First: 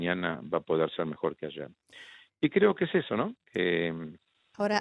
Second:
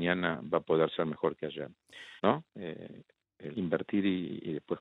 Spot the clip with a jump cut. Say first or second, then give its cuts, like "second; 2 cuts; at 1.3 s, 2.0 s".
second; 2 cuts; at 2.2 s, 3.5 s